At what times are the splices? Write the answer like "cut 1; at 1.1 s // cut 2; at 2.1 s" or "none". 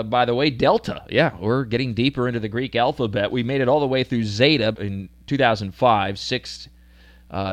cut 1; at 4.7 s